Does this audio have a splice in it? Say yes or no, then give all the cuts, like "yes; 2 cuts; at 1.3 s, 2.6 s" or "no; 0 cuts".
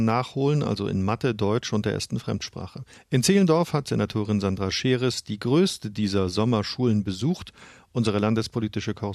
yes; 1 cut; at 2.9 s